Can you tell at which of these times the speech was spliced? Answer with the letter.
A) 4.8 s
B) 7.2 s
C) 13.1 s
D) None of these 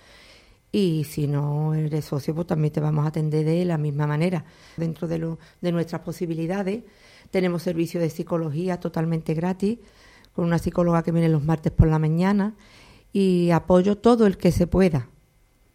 A